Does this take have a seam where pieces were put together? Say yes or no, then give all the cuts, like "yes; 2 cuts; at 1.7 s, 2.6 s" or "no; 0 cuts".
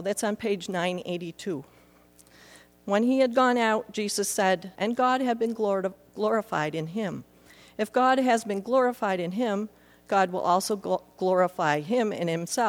yes; 1 cut; at 4.8 s